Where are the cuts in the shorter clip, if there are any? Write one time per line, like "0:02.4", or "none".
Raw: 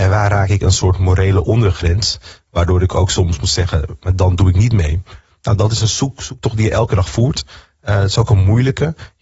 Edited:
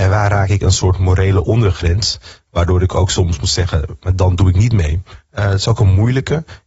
0:05.2